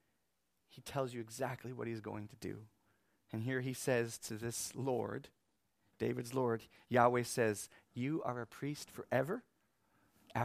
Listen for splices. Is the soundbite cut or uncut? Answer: uncut